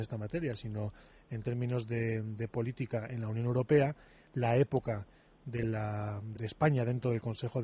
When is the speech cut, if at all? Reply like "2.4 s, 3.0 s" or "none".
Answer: 6.4 s